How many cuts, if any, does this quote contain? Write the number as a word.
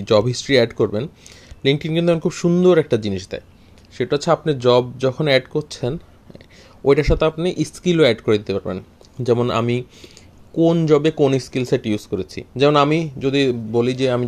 one